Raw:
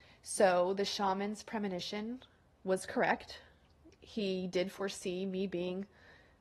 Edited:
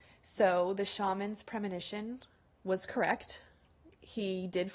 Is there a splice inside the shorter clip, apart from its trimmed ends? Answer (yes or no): no